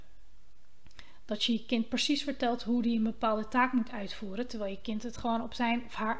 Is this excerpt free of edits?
yes; 0 cuts

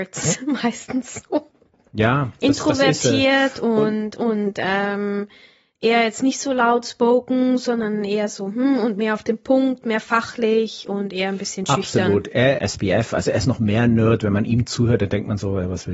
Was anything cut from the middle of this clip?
yes; 1 cut; at 12.6 s

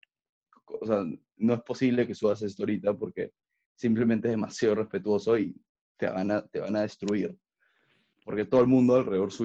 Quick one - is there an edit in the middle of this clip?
no; 0 cuts

